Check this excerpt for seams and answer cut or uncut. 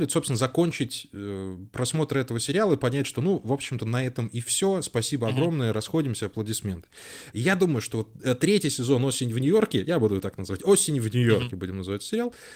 cut